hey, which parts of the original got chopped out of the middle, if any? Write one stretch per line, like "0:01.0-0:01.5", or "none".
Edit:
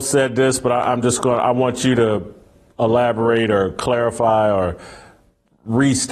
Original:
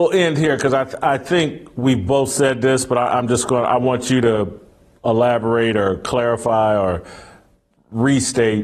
none